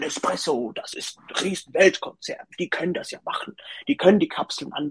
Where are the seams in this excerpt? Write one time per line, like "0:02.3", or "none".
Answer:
0:00.9